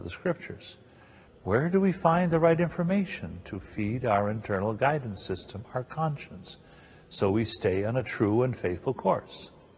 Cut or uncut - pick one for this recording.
cut